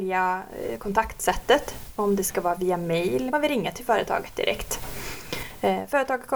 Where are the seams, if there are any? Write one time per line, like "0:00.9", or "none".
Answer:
0:03.3